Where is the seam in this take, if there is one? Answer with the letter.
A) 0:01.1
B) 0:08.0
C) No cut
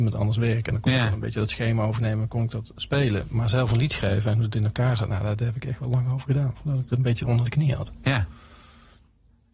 C